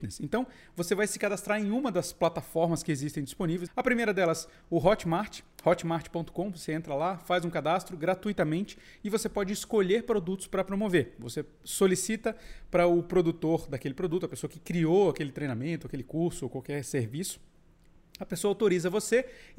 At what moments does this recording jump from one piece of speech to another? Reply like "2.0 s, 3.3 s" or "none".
3.7 s